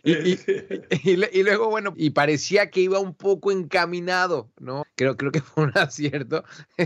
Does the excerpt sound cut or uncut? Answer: cut